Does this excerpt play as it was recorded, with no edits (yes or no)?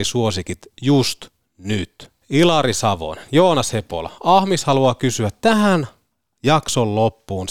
no